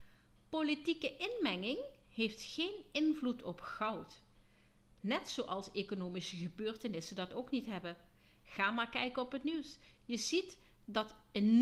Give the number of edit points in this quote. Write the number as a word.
zero